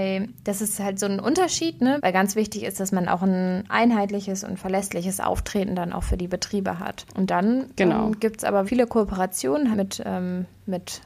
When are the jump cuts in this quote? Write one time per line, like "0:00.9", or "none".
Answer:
0:02.0
0:08.7
0:09.7